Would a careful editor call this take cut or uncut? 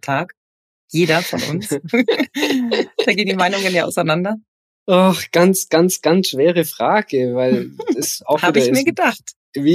uncut